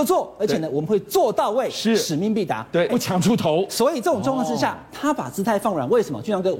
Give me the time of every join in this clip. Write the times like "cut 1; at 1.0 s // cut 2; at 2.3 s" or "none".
cut 1; at 2.9 s